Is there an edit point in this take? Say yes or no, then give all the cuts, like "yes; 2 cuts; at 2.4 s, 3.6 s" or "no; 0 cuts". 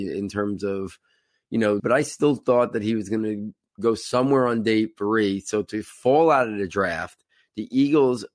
yes; 1 cut; at 1.8 s